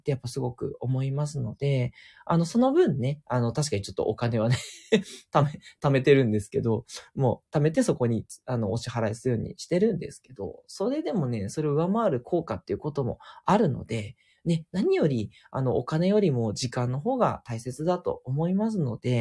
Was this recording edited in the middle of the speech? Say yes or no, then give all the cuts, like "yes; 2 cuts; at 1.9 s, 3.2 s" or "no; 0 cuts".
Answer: no; 0 cuts